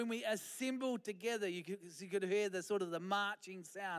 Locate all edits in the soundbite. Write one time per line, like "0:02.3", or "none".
none